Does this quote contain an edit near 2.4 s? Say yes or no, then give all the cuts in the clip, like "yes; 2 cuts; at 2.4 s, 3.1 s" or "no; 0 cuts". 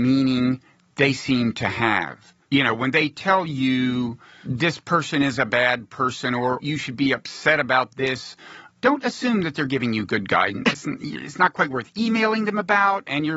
yes; 2 cuts; at 2.4 s, 10.7 s